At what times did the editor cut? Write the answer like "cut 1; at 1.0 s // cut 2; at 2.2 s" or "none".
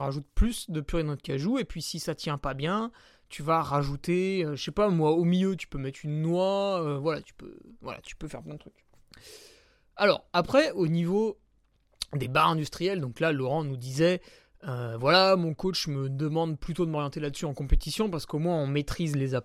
none